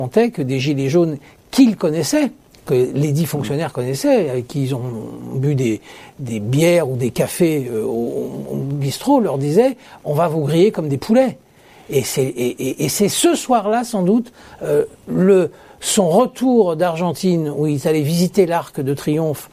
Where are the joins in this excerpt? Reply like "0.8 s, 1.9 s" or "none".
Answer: none